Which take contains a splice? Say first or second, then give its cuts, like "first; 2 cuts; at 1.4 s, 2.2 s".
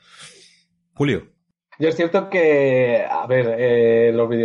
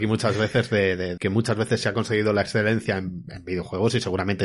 second; 1 cut; at 1.2 s